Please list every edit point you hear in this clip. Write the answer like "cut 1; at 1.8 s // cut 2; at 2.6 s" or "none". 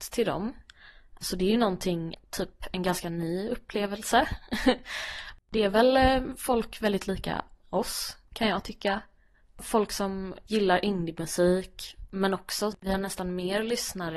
cut 1; at 8.3 s